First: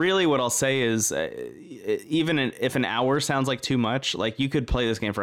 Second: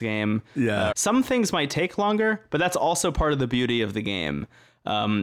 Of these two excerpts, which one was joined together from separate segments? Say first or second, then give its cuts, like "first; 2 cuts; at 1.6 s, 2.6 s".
second; 1 cut; at 0.9 s